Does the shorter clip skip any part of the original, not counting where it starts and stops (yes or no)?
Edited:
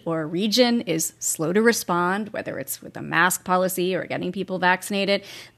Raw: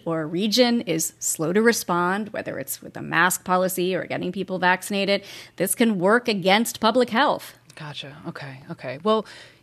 no